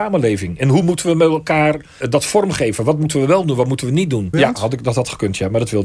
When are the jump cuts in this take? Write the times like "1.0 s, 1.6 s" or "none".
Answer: 2.0 s, 4.3 s

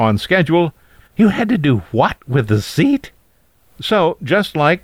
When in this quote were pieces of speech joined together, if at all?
1.0 s

